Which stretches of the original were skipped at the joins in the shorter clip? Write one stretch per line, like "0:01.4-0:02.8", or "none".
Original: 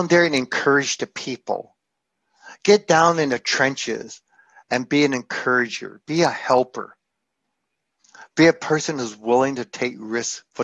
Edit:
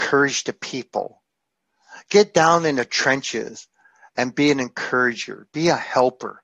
none

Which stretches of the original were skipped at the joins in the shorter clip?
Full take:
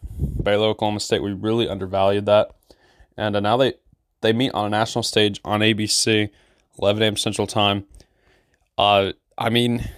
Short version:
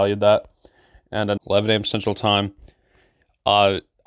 0:03.4-0:06.7

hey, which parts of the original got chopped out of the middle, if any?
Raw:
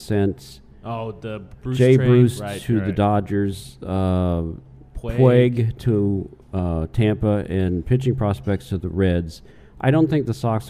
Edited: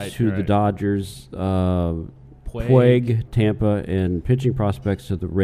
0:05.8-0:06.9

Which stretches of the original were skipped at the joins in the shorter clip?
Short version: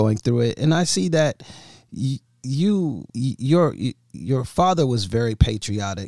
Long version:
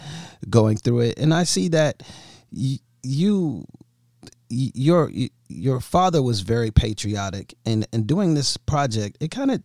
0:03.7-0:04.5

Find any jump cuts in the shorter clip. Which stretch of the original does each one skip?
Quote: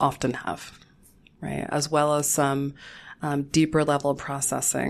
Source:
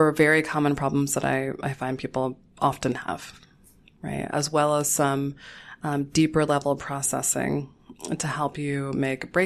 none

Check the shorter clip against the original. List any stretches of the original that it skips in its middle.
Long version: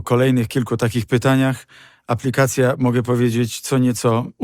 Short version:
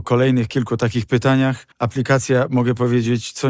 0:01.7-0:02.0

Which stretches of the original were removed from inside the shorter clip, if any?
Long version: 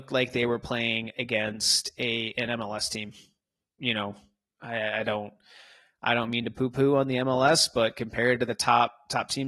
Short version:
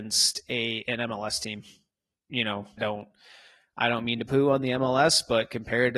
0:04.3-0:05.0
0:06.5-0:06.7

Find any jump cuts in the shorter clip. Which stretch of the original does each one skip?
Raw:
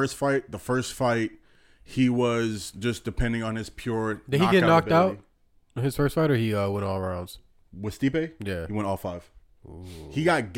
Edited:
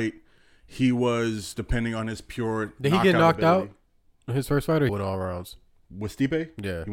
0:02.7-0:03.0
0:06.4-0:06.7

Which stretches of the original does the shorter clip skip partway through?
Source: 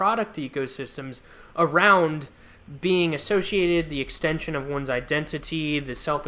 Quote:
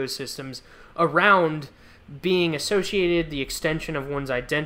none

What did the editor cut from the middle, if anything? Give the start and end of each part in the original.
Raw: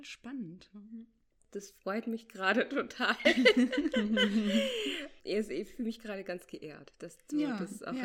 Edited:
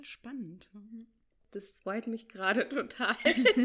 none

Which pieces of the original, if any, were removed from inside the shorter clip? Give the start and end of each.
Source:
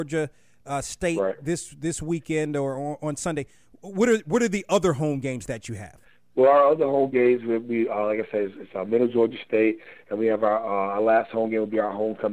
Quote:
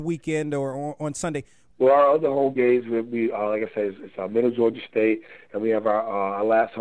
0:03.7-0:06.3

